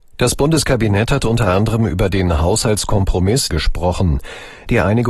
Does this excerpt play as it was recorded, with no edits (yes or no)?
no